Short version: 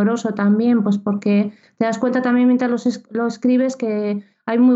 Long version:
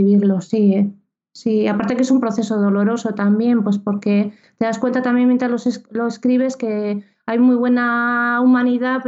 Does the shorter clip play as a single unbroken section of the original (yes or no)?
yes